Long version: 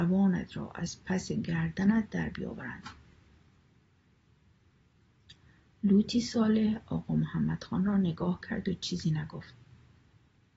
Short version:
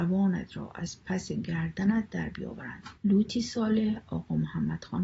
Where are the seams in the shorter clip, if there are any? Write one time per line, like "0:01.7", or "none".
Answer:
0:03.0